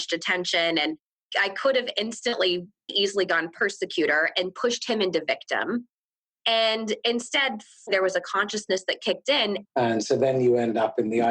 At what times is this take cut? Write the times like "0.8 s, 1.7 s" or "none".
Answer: 2.9 s, 7.9 s, 9.6 s